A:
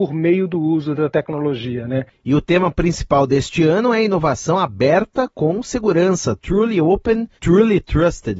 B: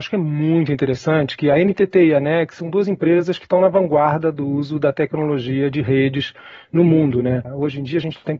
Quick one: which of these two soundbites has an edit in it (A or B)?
A